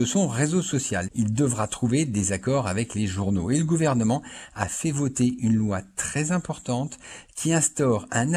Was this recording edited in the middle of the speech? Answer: yes; 1 cut; at 1.1 s

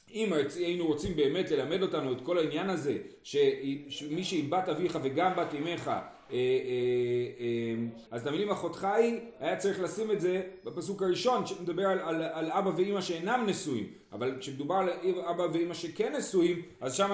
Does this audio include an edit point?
yes; 1 cut; at 8.1 s

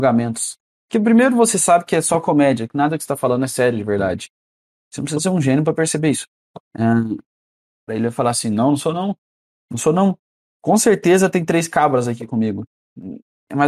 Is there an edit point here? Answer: yes; 1 cut; at 7.9 s

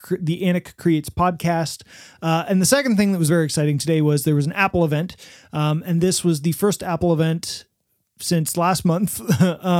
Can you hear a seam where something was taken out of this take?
no; 0 cuts

